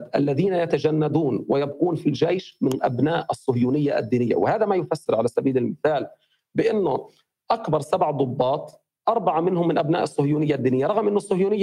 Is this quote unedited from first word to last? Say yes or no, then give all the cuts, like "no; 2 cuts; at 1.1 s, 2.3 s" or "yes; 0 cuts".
yes; 0 cuts